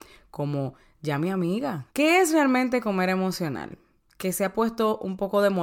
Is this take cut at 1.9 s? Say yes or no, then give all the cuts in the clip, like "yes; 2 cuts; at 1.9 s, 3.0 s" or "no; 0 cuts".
yes; 1 cut; at 1.9 s